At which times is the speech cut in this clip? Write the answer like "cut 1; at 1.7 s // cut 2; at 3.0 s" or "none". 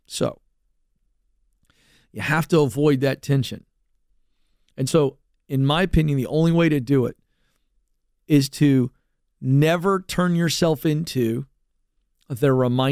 none